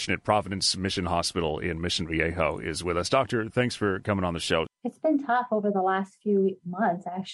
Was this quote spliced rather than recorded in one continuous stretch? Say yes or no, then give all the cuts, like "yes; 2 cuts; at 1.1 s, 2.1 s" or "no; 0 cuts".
yes; 1 cut; at 4.7 s